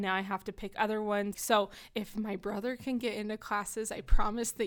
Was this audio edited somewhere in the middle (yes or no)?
yes